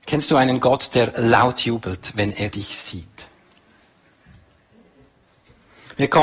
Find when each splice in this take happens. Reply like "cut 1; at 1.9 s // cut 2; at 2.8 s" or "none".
none